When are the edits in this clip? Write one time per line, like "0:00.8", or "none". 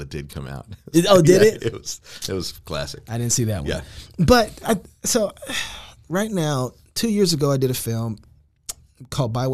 none